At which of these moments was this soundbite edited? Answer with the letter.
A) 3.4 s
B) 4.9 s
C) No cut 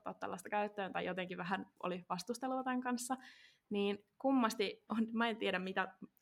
B